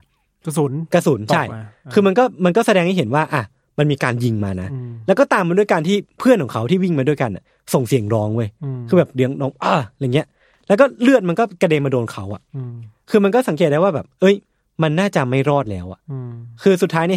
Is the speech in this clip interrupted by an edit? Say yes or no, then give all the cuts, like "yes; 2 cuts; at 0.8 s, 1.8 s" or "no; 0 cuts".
no; 0 cuts